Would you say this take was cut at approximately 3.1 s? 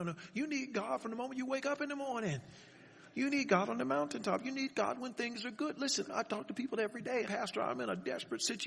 no; 2 cuts; at 6.1 s, 7.3 s

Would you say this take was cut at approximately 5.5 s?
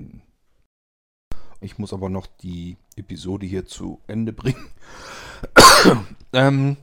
no; 1 cut; at 1.6 s

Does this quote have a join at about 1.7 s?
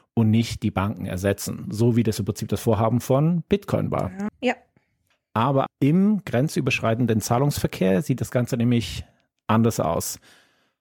no; 2 cuts; at 4.3 s, 5.7 s

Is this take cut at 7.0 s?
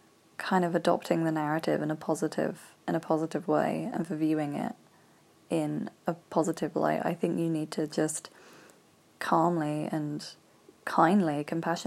no; 0 cuts

